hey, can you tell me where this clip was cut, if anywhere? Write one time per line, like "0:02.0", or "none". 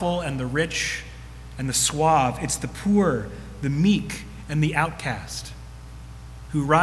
none